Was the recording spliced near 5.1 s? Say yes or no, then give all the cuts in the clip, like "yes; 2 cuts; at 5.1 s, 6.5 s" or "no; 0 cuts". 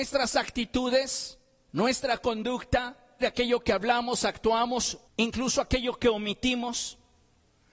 yes; 2 cuts; at 3.2 s, 5.1 s